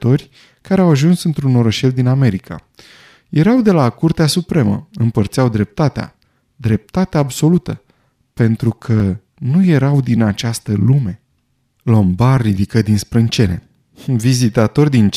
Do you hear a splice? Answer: no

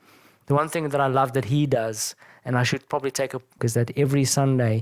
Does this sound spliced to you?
yes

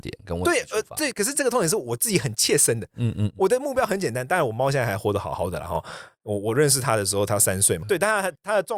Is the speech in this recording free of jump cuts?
no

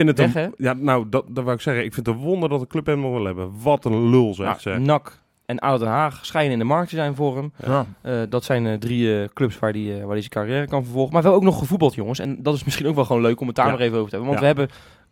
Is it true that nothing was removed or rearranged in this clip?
no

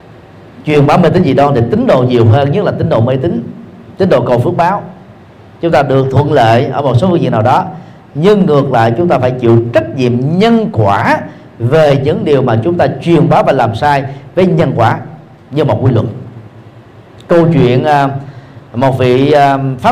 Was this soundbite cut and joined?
no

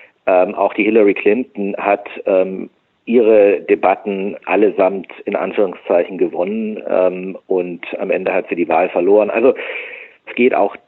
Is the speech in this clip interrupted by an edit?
yes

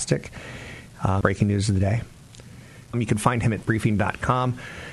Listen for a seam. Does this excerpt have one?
yes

